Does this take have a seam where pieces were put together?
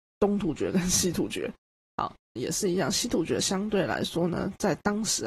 yes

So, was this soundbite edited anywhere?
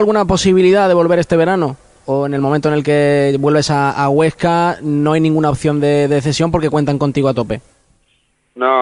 no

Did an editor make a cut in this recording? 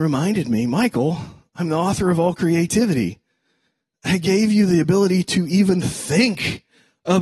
no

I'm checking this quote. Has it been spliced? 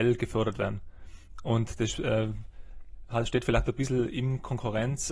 no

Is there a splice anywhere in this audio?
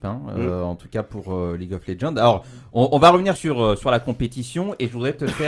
no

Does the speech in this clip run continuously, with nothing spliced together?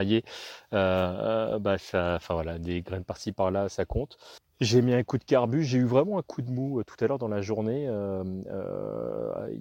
no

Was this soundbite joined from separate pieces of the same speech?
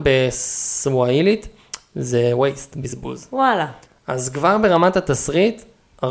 yes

